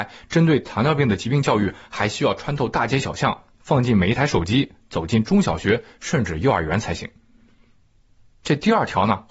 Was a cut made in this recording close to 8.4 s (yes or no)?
yes